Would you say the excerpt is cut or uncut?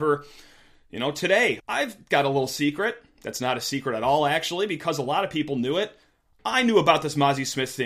cut